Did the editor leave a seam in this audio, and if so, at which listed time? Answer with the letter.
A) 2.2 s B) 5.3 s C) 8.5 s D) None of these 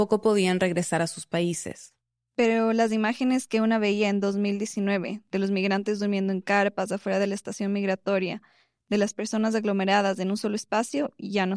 B